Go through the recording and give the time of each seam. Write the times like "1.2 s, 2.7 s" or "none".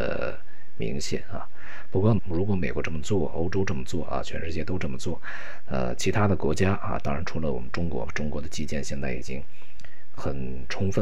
2.2 s